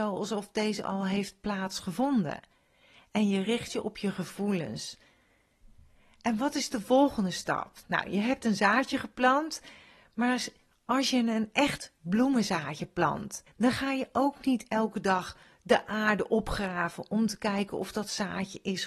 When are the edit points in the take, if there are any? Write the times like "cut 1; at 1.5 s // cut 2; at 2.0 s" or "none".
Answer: cut 1; at 13.5 s